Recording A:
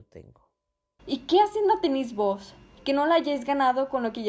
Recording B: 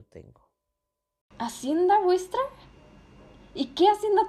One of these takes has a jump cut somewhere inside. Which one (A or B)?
A